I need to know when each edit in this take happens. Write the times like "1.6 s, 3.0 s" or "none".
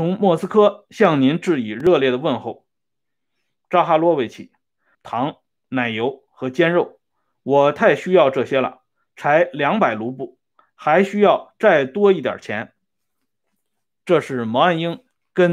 4.9 s